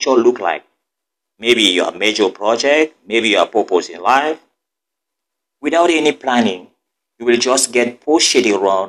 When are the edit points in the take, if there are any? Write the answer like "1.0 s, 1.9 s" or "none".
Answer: 5.5 s